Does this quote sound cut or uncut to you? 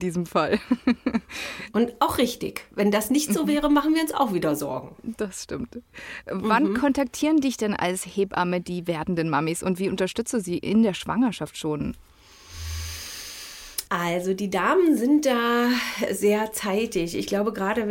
cut